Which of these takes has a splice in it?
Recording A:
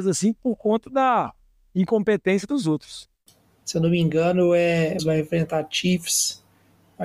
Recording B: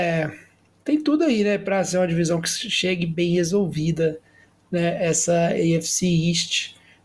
A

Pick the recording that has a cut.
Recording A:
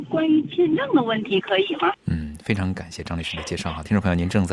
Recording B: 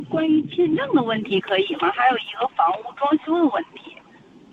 A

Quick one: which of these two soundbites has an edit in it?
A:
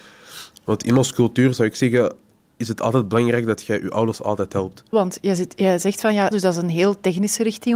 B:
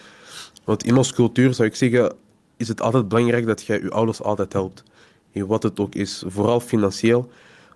A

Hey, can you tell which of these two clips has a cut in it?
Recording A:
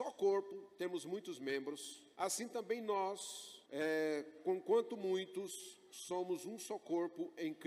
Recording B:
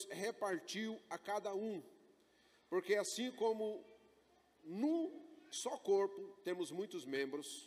A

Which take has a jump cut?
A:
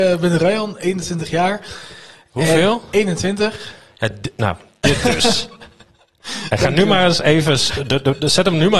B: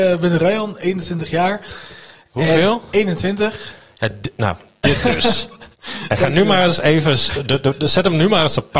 B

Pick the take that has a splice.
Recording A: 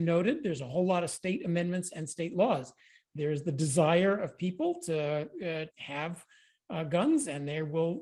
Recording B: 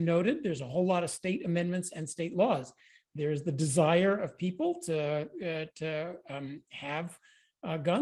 A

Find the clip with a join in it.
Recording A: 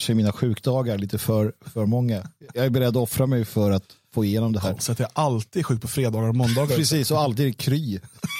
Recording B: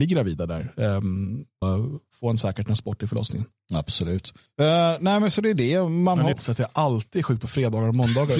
B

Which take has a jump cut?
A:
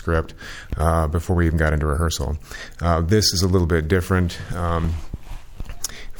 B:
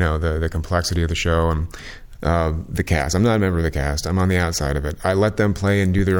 B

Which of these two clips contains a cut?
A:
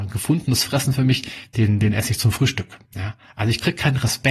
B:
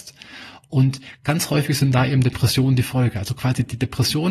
A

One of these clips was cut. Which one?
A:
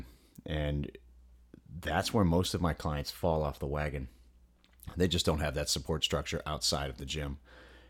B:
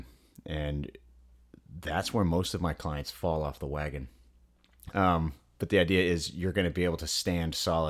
B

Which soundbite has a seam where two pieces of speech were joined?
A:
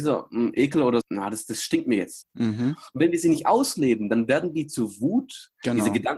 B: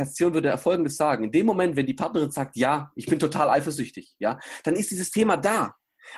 A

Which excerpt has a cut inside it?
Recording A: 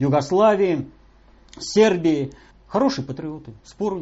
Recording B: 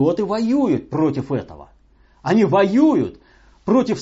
A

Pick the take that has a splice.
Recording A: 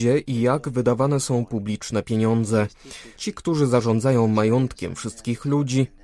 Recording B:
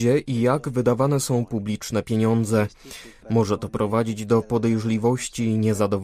A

